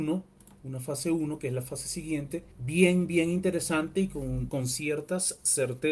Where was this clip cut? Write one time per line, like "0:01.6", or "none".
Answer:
0:02.5
0:04.5